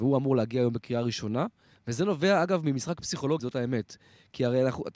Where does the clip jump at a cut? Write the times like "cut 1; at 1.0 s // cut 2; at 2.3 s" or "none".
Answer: cut 1; at 1.7 s // cut 2; at 3.4 s

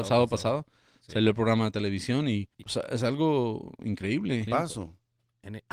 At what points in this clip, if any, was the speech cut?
cut 1; at 2.5 s // cut 2; at 4.5 s

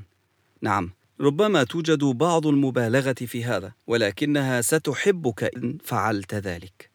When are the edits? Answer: cut 1; at 3.8 s

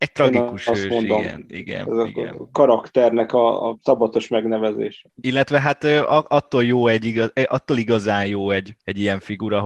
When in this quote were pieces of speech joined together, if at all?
none

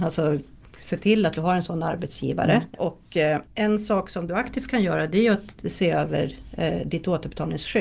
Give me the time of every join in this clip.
none

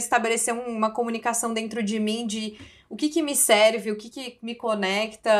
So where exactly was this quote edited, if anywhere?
none

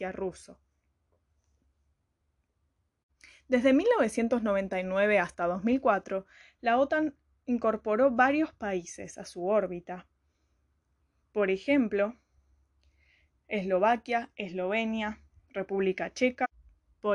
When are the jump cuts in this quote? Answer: none

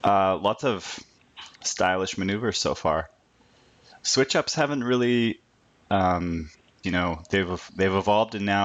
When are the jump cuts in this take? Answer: cut 1; at 6.8 s

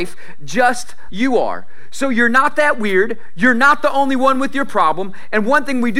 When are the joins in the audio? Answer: cut 1; at 1.1 s

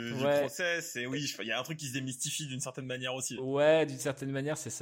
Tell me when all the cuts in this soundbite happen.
none

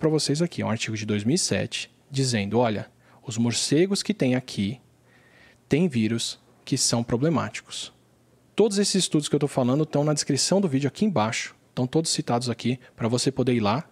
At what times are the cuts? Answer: cut 1; at 8.5 s

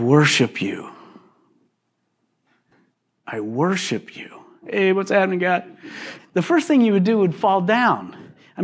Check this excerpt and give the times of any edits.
cut 1; at 4.6 s // cut 2; at 6.2 s

